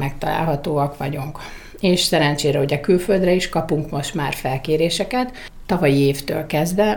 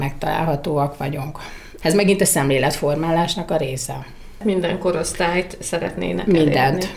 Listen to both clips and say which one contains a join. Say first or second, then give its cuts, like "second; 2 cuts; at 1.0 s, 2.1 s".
second; 1 cut; at 1.8 s